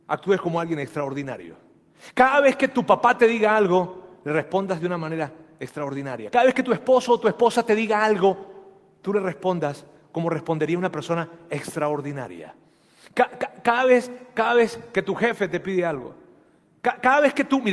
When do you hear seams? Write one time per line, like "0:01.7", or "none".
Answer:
0:06.3